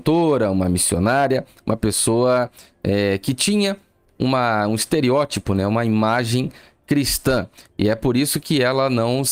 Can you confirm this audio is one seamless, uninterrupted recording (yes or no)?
yes